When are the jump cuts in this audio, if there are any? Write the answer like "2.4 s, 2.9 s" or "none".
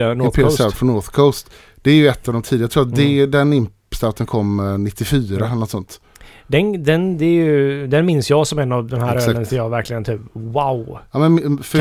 none